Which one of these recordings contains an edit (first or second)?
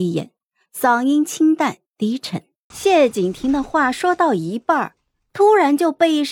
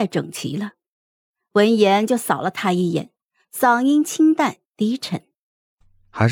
first